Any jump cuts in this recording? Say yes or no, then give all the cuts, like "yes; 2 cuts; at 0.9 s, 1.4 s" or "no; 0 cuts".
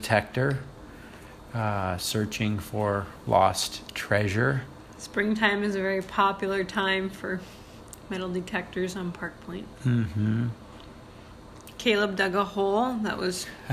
yes; 1 cut; at 11.8 s